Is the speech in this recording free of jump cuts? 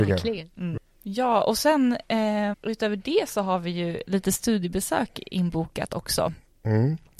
no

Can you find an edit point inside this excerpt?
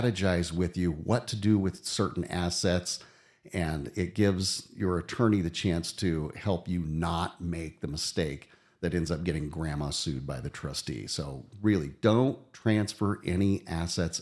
no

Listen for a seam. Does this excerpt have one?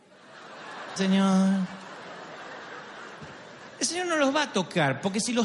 yes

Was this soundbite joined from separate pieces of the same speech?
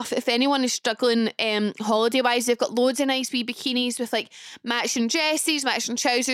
no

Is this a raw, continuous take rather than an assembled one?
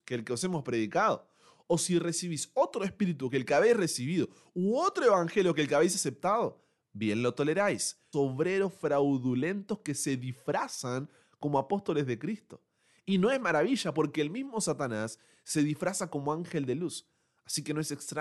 no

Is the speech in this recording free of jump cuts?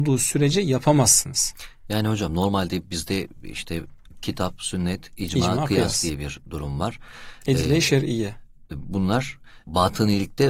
yes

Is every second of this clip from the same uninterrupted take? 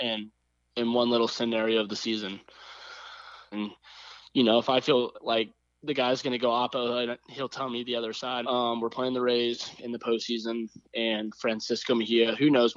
no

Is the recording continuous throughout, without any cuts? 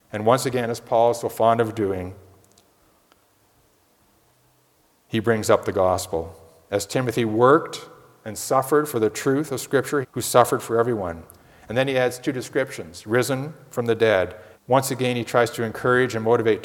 no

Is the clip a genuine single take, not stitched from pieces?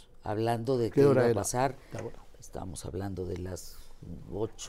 yes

